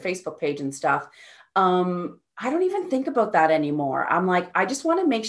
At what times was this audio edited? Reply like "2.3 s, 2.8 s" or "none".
none